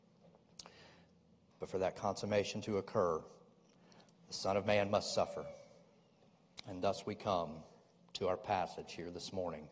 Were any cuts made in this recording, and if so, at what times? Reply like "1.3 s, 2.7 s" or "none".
1.5 s, 6.6 s